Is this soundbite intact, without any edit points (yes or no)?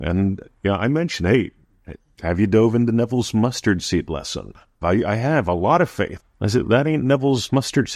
no